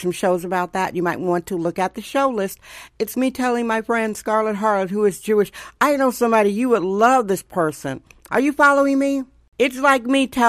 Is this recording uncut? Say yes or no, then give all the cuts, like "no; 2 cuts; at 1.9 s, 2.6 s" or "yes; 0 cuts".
no; 2 cuts; at 3.1 s, 8.3 s